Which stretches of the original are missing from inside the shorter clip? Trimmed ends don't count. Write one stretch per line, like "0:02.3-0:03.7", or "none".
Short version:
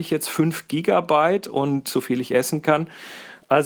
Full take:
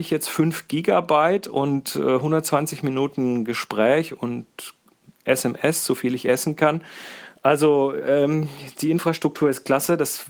0:01.9-0:05.9